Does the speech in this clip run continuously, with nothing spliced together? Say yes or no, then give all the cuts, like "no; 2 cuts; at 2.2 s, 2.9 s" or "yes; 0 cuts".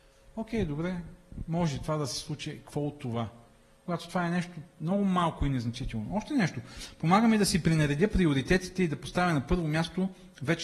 yes; 0 cuts